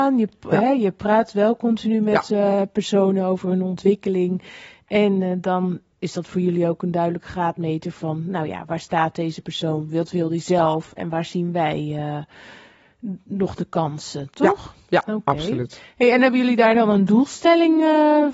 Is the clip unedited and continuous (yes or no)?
yes